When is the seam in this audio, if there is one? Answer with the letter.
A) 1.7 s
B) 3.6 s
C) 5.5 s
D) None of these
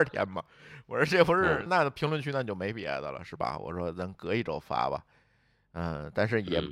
A